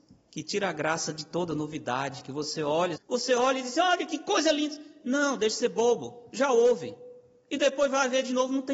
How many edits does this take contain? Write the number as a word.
one